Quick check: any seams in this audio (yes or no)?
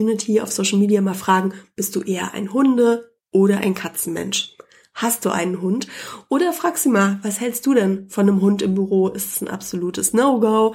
no